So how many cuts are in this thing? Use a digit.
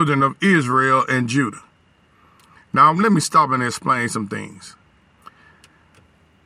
1